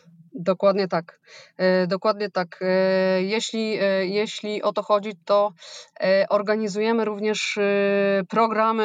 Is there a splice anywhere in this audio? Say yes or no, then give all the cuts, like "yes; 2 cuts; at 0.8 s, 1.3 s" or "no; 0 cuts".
no; 0 cuts